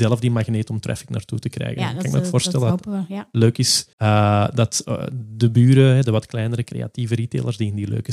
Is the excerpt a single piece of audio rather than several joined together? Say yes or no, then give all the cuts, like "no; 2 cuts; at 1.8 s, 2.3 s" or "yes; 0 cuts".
no; 1 cut; at 3.9 s